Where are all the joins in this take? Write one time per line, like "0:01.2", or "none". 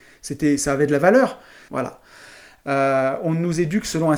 0:01.7